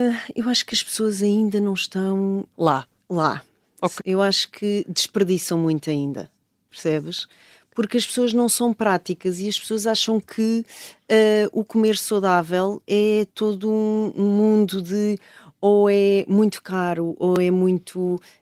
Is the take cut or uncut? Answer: cut